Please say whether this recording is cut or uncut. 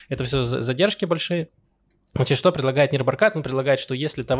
uncut